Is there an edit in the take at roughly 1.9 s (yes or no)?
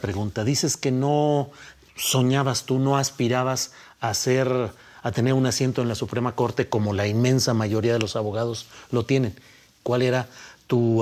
no